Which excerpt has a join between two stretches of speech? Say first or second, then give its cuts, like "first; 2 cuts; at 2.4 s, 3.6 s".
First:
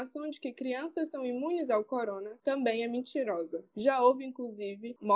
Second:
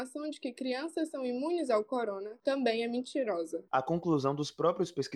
second; 1 cut; at 3.7 s